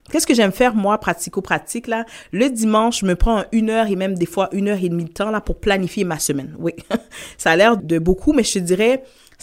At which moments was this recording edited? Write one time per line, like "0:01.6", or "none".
0:07.8